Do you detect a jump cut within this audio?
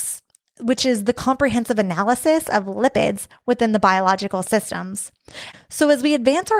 yes; 1 cut; at 5.5 s

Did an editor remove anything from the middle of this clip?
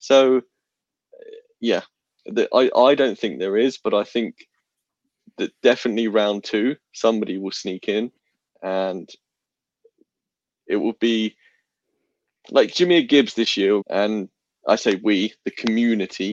yes; 1 cut; at 13.8 s

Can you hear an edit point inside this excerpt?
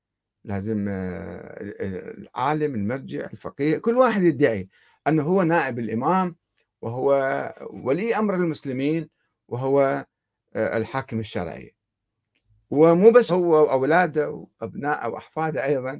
yes; 2 cuts; at 13.3 s, 14.5 s

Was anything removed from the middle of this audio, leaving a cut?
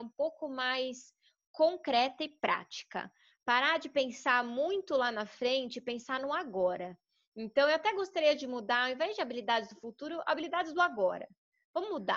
no; 0 cuts

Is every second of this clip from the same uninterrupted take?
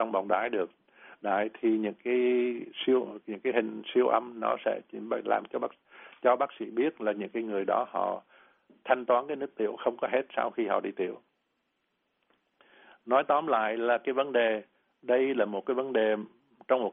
yes; 0 cuts

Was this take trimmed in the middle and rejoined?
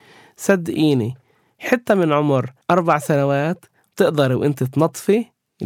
yes; 1 cut; at 2.6 s

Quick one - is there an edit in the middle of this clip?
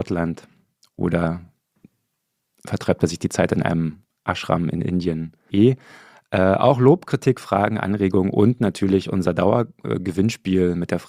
yes; 1 cut; at 5.5 s

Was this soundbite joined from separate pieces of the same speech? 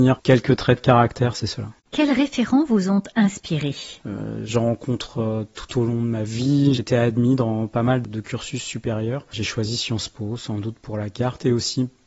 yes; 2 cuts; at 1.8 s, 6.8 s

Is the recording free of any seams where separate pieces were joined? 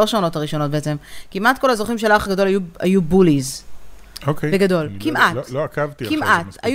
yes; 0 cuts

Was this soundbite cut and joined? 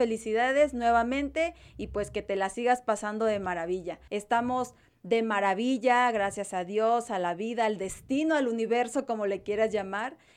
yes; 1 cut; at 4.1 s

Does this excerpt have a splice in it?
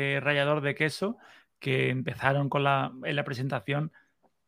no; 0 cuts

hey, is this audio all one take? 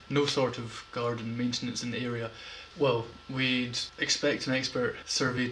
no; 1 cut; at 2.7 s

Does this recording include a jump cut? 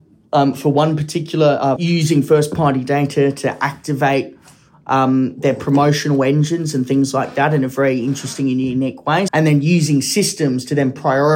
yes; 2 cuts; at 1.8 s, 9.3 s

